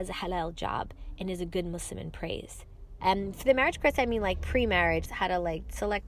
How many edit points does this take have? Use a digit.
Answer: 2